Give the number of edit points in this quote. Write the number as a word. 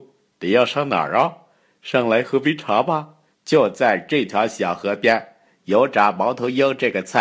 one